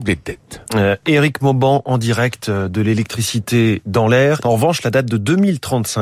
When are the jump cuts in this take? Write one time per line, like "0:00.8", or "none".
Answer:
0:04.4